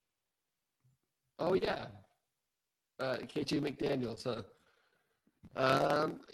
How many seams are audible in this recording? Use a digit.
0